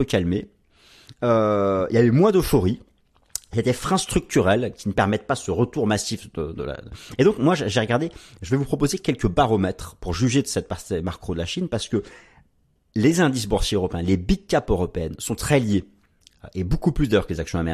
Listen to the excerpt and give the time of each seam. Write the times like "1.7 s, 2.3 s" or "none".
none